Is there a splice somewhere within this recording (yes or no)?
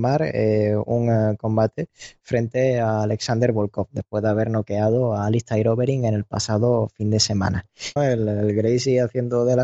yes